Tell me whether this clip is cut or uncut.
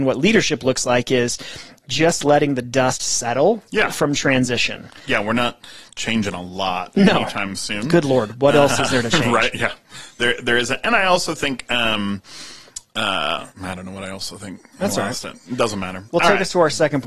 cut